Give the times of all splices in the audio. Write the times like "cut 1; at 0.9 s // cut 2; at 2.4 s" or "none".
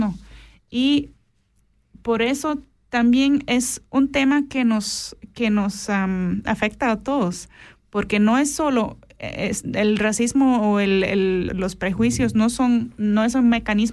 cut 1; at 11.5 s